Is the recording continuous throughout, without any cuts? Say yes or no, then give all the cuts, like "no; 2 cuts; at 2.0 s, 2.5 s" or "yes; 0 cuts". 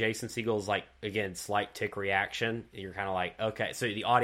yes; 0 cuts